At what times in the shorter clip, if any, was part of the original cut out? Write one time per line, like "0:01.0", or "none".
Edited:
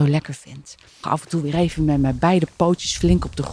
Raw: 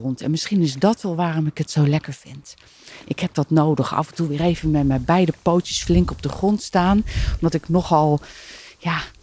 0:01.0